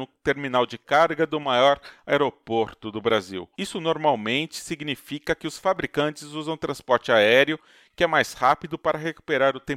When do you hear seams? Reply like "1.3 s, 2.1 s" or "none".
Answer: 3.5 s